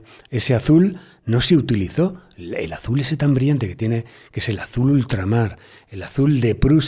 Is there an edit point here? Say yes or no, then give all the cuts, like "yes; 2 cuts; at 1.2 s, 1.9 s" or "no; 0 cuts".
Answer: no; 0 cuts